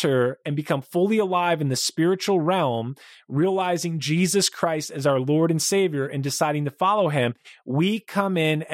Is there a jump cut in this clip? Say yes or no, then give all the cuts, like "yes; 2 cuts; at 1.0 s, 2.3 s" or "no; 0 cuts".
no; 0 cuts